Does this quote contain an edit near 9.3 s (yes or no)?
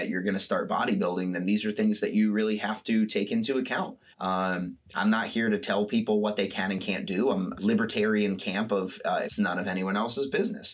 yes